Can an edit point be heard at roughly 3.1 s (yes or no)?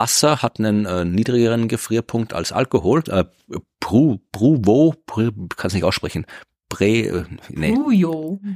yes